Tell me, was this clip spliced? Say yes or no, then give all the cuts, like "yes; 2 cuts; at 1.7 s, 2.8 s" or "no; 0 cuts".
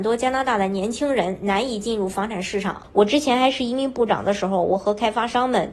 yes; 1 cut; at 2.8 s